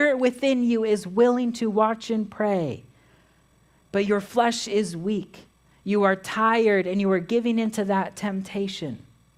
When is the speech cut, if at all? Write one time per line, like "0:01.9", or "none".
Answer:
none